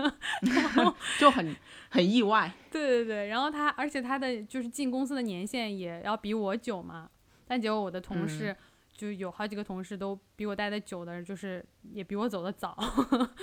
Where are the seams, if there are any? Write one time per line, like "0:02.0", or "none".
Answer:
none